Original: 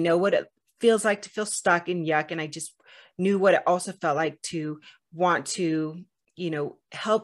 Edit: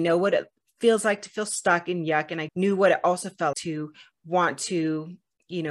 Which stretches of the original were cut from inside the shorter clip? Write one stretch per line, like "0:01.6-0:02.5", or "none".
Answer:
0:02.5-0:03.1
0:04.1-0:04.4